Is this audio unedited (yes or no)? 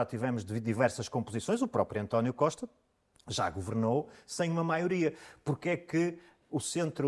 yes